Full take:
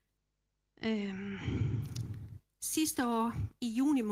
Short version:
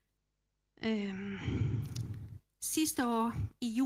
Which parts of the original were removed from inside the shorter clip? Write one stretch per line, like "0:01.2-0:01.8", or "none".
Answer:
none

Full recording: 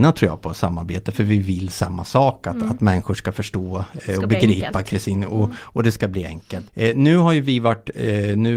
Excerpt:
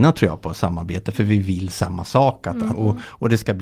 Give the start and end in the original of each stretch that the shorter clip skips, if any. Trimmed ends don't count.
0:02.7-0:05.3

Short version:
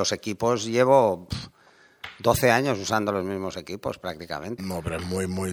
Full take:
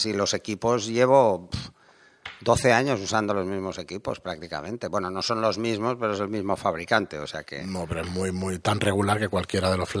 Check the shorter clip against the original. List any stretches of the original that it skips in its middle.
0:04.8-0:07.6

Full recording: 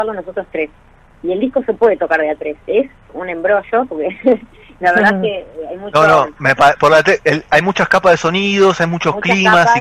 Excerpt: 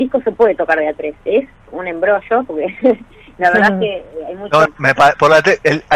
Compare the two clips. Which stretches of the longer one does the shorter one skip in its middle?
0:06.1-0:06.3

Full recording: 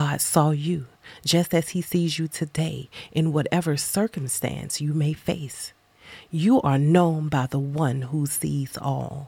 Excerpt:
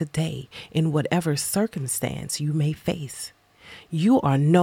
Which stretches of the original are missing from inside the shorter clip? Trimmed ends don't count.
none

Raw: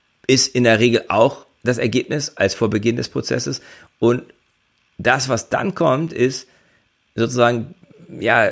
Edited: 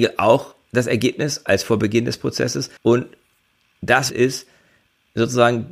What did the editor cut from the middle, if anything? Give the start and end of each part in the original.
0:03.7-0:03.9
0:05.3-0:06.1

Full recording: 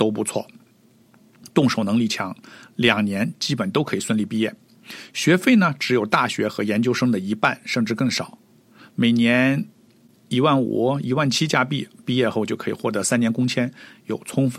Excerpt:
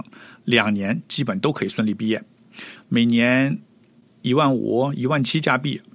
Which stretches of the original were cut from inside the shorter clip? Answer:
0:05.1-0:08.8

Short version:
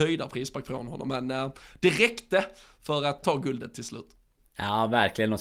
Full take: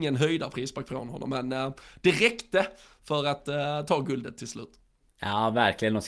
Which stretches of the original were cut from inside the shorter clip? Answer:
0:03.4-0:03.9

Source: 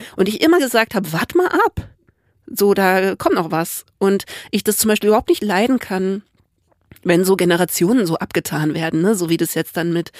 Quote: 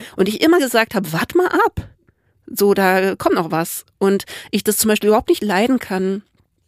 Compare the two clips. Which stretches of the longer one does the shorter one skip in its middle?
none

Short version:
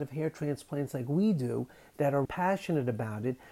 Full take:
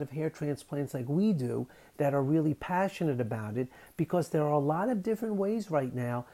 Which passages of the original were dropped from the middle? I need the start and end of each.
0:02.3-0:02.6

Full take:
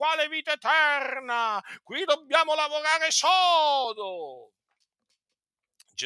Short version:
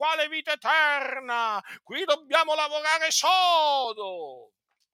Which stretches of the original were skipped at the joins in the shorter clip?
none

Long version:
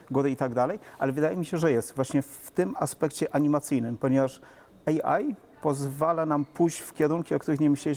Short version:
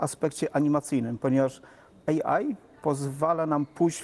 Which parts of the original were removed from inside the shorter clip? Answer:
none

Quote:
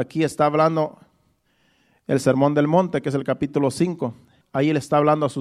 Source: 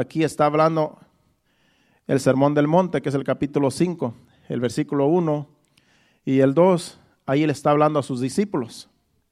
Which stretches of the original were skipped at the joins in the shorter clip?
0:04.4-0:07.1

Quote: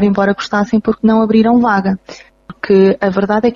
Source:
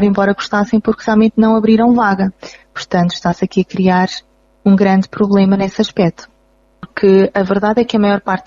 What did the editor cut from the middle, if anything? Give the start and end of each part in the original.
0:01.0-0:01.3
0:02.6-0:06.6

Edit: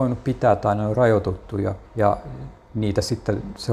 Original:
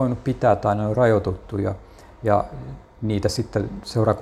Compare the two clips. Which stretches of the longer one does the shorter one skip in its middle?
0:01.9-0:02.1

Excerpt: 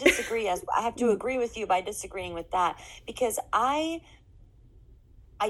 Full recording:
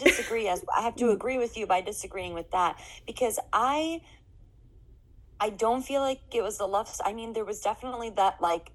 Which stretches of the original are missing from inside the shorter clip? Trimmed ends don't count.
none

